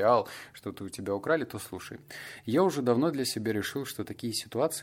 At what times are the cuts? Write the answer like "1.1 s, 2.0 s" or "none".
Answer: none